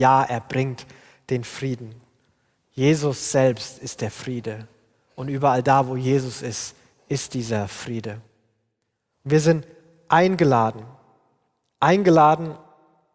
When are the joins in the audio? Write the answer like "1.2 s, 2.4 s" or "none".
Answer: none